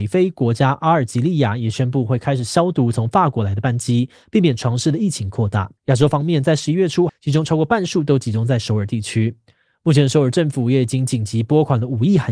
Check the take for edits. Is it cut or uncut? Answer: cut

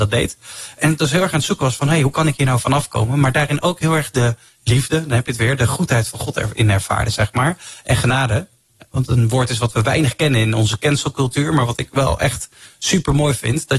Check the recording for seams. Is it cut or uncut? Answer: uncut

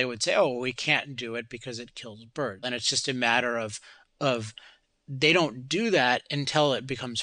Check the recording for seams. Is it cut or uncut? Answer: cut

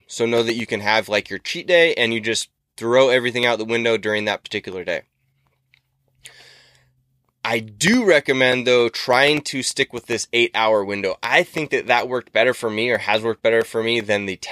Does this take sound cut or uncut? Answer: uncut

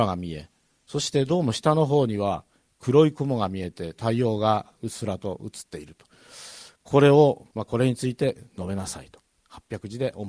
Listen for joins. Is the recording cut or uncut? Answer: cut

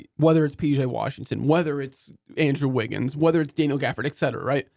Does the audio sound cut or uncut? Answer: uncut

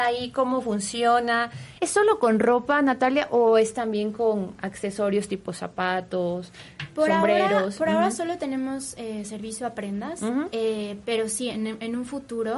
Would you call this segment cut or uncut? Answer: cut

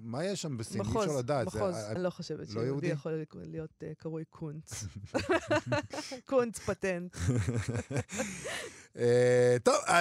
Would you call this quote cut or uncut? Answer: cut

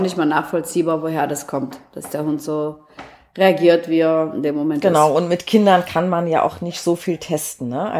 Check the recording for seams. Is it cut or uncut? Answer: uncut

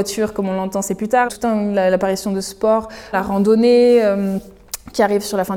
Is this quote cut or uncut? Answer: cut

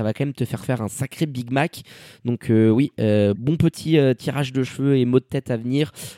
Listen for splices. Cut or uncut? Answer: cut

